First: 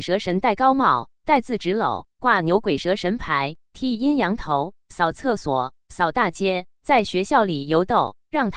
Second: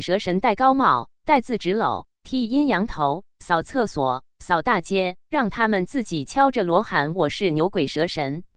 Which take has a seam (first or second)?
second